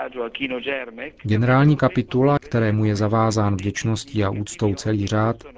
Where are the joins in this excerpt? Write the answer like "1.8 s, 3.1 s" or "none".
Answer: 2.4 s